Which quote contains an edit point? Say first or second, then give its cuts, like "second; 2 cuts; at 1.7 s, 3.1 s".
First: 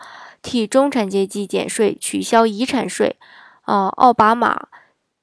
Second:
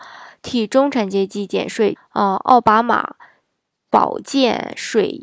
second; 1 cut; at 2.0 s